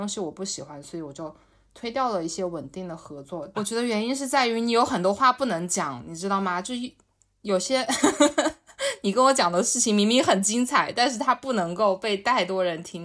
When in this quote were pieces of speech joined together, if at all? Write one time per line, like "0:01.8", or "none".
0:03.5